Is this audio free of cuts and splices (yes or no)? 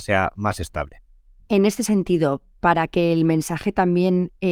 yes